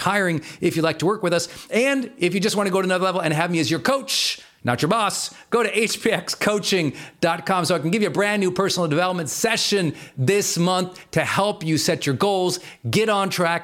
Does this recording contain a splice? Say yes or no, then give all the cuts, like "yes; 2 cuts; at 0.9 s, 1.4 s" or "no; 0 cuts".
no; 0 cuts